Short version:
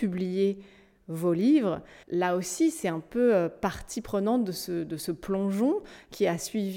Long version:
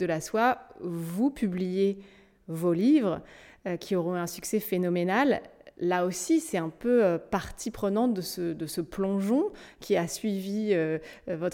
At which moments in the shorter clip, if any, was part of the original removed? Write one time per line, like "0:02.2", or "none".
0:02.0

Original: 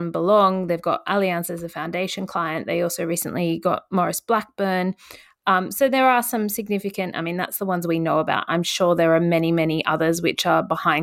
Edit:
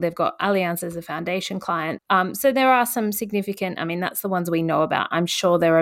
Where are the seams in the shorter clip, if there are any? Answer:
0:02.0

